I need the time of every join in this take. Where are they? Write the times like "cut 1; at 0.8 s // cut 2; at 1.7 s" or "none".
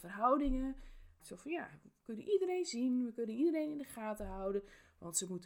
cut 1; at 1.2 s